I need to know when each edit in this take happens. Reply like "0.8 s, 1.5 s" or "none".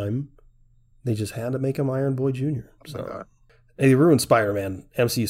2.8 s